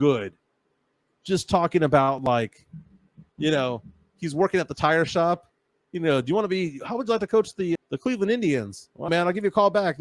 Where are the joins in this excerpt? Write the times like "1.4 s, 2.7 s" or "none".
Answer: 3.3 s, 7.8 s, 9.1 s